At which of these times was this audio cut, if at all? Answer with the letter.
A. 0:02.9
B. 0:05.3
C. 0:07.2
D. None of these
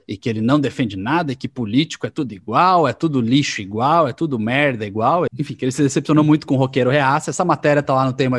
B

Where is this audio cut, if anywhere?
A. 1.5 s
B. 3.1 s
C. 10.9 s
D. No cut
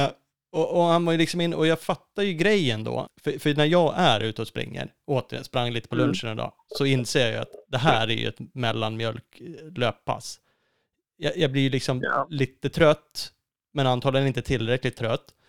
B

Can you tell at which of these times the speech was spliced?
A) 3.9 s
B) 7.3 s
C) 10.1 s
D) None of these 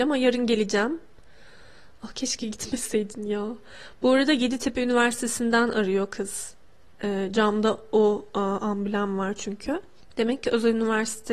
D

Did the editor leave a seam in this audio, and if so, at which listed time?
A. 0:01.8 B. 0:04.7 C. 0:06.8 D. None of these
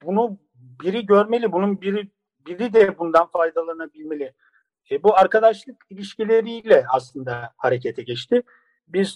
D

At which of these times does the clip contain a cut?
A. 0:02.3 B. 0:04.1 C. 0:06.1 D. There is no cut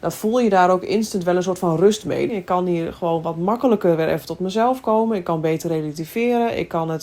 A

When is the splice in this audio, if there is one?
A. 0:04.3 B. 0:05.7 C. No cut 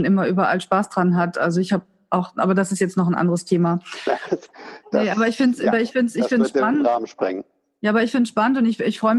A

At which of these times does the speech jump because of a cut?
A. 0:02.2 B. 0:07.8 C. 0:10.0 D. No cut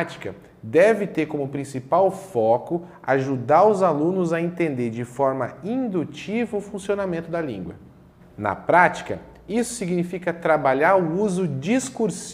D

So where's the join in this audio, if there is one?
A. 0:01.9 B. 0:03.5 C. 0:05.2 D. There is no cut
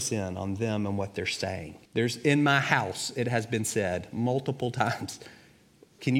A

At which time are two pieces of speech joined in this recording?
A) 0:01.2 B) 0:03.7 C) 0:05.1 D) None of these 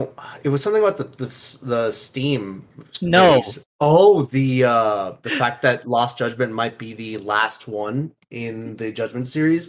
B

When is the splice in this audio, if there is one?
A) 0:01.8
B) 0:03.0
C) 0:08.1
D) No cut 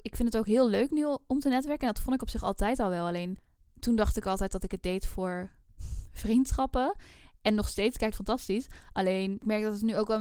C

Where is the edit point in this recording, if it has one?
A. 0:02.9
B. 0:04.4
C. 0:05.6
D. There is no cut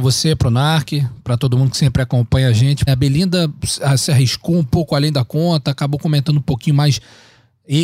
A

